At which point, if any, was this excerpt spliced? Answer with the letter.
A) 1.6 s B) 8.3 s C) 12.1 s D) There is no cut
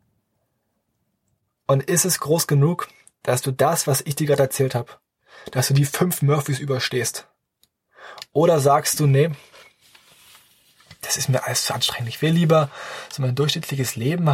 D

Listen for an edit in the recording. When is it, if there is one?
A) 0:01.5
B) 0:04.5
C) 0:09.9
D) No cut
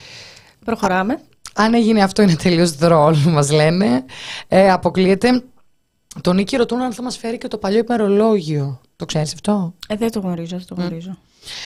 D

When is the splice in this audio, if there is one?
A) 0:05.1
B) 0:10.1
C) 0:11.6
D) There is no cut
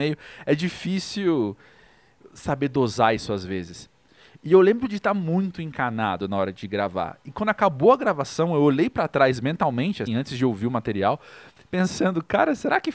B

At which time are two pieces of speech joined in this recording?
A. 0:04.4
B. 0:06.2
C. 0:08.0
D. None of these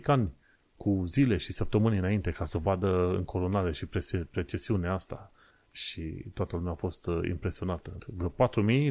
C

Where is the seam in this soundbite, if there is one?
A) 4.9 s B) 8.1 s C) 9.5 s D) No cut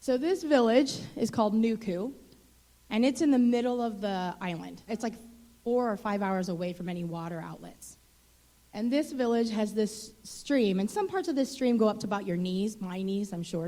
A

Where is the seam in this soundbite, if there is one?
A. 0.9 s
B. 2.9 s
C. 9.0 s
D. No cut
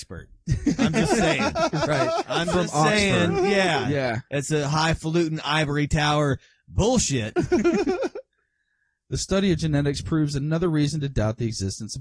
D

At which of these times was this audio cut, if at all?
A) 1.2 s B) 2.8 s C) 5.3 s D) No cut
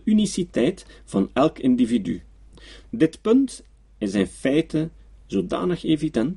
B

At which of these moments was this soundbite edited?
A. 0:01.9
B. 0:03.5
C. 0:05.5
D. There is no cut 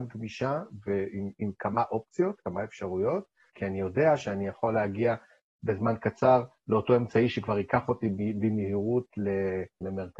B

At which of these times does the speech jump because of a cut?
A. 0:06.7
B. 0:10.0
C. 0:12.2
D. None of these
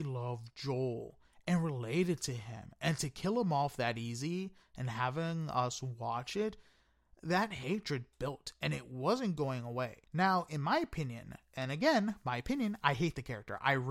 B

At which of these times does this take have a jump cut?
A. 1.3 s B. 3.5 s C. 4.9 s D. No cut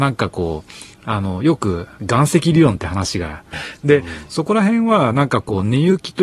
B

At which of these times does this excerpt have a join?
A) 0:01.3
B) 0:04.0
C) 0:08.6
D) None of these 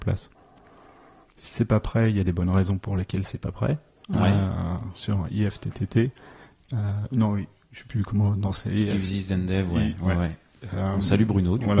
B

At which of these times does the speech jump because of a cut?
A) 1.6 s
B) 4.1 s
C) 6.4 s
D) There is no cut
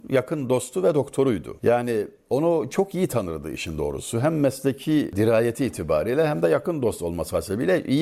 D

